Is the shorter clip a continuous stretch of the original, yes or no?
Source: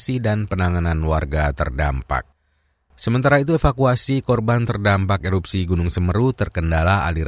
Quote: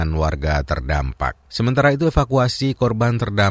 no